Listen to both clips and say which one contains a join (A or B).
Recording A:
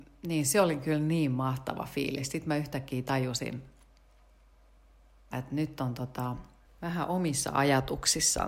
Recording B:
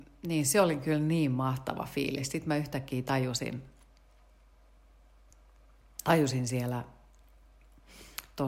A